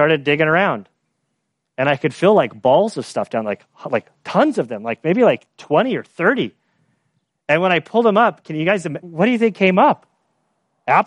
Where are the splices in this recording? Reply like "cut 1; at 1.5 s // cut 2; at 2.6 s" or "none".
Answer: cut 1; at 9.0 s